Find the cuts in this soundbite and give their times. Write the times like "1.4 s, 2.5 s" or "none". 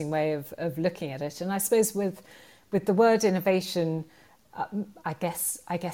none